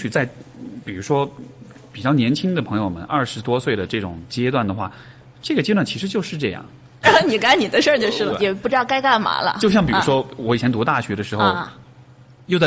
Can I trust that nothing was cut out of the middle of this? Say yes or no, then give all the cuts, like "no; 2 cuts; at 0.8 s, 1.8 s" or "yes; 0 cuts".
no; 2 cuts; at 7.0 s, 8.3 s